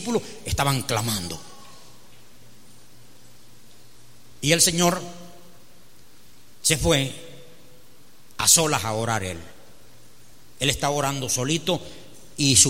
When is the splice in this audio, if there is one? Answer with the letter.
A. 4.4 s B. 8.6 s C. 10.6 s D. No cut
A